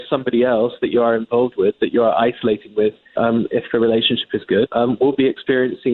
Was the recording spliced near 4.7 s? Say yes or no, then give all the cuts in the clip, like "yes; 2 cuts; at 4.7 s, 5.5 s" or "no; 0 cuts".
yes; 2 cuts; at 3.2 s, 4.7 s